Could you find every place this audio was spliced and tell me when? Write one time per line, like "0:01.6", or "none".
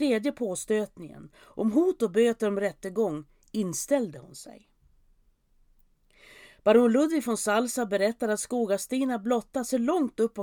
none